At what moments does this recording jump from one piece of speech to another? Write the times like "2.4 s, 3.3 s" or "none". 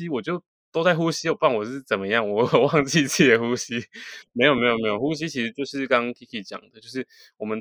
none

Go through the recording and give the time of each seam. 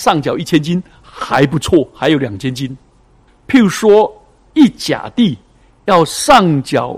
3.3 s

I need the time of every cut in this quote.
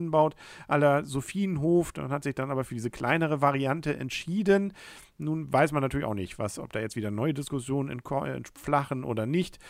none

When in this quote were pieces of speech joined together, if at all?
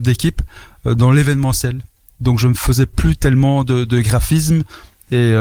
none

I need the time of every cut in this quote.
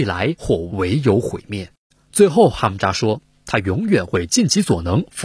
none

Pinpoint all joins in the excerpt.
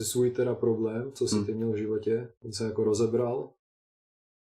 2.4 s

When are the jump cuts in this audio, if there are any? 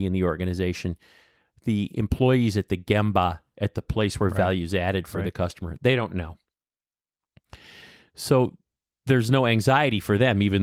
none

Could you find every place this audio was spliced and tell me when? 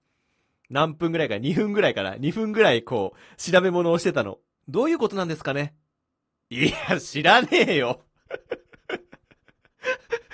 4.6 s

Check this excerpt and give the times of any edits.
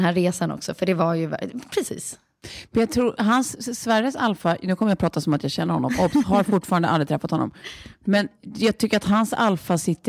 none

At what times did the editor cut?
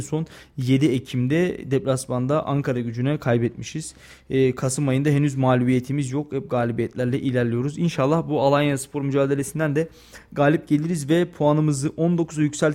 none

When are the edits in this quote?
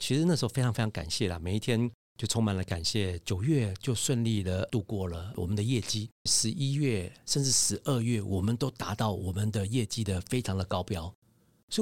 6.3 s

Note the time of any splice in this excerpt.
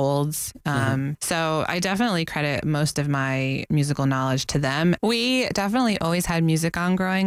1.1 s, 5.0 s

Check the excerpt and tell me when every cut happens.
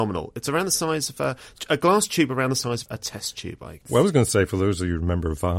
2.9 s

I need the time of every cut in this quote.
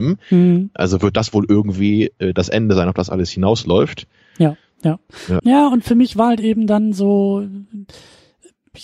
5.4 s

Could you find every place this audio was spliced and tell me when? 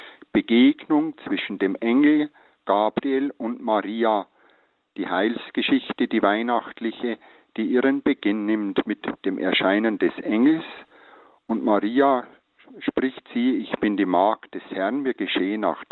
none

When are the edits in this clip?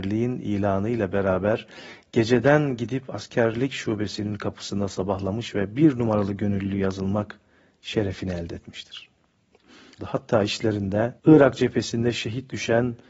10.0 s, 11.2 s

